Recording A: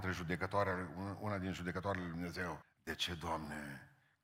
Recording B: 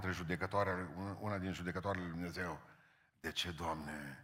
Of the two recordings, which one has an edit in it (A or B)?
A